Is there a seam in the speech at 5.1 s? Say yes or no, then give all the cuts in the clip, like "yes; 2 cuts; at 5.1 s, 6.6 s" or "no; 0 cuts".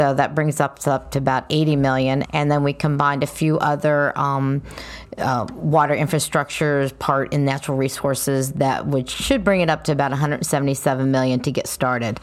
no; 1 cut; at 2.2 s